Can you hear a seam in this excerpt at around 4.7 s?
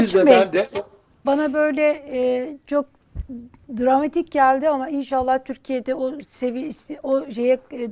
no; 1 cut; at 1.2 s

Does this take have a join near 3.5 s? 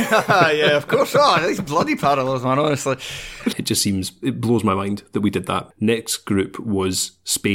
yes; 2 cuts; at 3.5 s, 5.7 s

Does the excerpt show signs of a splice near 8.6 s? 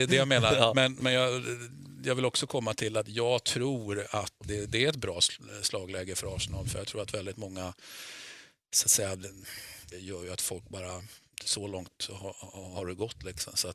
no; 3 cuts; at 4.4 s, 9.9 s, 11.4 s

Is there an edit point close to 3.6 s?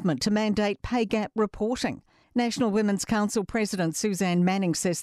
no; 1 cut; at 2.2 s

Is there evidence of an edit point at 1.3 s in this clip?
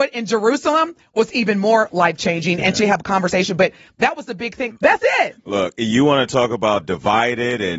no; 2 cuts; at 2.8 s, 4.7 s

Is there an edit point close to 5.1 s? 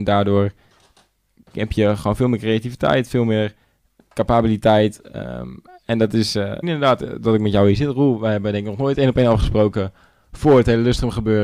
no; 1 cut; at 6.6 s

